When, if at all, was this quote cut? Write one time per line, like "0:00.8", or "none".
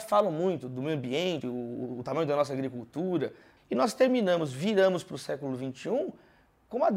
0:01.4
0:03.6